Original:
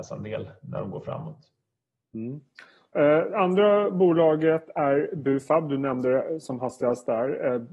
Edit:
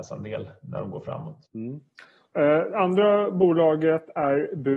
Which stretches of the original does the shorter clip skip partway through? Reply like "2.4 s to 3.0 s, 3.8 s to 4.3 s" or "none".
1.5 s to 2.1 s